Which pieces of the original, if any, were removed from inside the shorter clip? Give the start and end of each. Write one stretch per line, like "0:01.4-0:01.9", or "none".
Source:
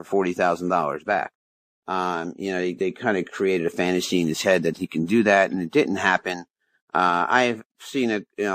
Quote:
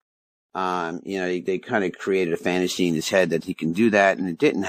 none